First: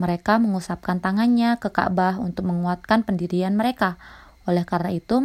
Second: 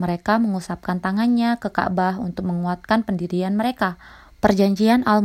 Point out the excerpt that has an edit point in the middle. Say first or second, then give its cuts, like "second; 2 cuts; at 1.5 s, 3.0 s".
second; 1 cut; at 4.3 s